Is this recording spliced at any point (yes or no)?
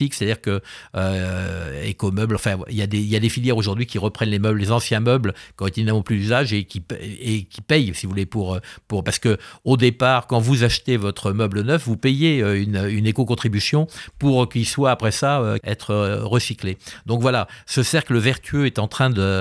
yes